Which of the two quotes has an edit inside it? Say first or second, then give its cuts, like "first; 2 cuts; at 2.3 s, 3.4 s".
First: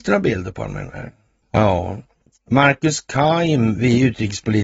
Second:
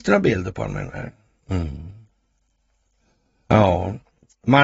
first; 1 cut; at 1.4 s